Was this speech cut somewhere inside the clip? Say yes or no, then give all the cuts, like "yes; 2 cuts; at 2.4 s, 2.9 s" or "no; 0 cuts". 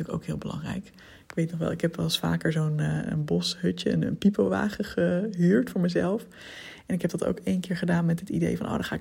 no; 0 cuts